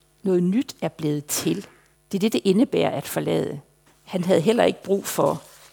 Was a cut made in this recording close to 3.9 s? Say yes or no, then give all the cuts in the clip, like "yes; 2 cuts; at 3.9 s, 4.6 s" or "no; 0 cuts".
yes; 2 cuts; at 1.9 s, 3.9 s